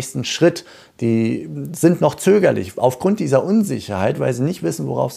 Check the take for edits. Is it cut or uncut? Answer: uncut